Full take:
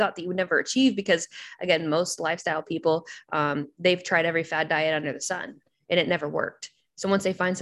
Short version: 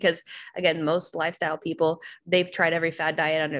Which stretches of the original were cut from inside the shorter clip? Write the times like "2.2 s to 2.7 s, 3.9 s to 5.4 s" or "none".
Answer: 3.3 s to 3.7 s